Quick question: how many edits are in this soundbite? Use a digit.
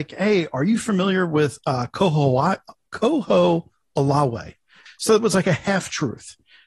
1